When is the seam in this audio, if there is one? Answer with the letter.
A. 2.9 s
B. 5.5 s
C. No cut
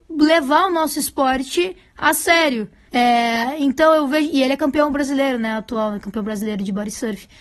A